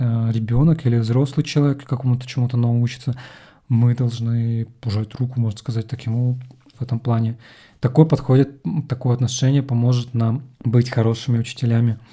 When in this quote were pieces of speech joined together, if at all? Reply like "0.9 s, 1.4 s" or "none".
6.7 s, 8.9 s, 10.5 s